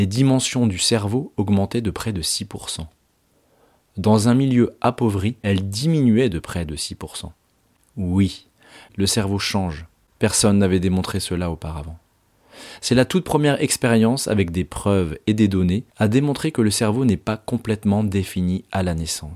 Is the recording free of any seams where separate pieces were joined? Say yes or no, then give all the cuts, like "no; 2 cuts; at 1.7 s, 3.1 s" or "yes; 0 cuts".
no; 1 cut; at 15.9 s